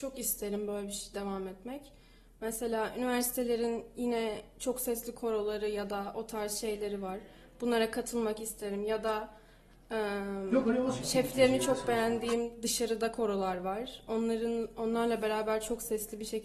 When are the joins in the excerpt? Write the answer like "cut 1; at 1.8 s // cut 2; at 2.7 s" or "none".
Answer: none